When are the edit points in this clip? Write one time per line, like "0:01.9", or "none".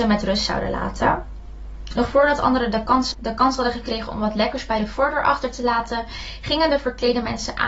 0:02.0
0:03.1